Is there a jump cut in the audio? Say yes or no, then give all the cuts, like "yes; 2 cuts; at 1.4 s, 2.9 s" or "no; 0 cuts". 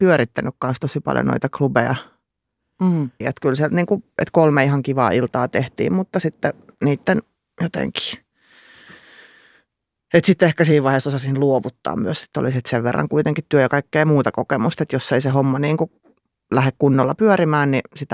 yes; 1 cut; at 3.2 s